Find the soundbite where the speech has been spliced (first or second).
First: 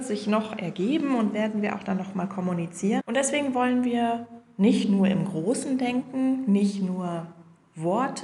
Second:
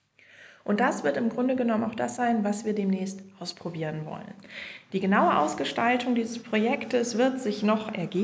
first